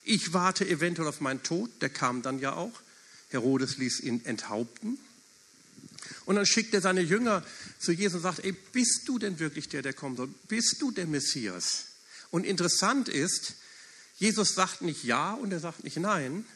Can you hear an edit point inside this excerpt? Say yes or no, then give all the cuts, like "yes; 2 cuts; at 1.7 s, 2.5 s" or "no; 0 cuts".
no; 0 cuts